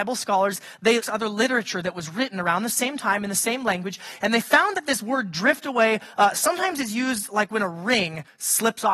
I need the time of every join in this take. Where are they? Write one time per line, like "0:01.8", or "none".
0:01.0